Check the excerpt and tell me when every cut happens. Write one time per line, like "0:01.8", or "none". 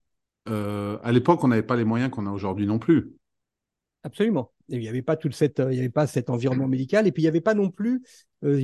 none